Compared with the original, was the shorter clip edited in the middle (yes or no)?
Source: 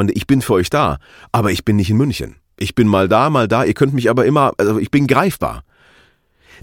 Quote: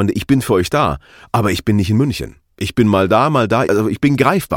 yes